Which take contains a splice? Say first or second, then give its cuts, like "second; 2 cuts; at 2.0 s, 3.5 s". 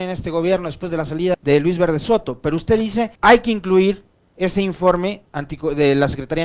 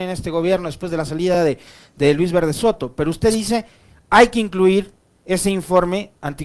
first; 2 cuts; at 1.3 s, 3.2 s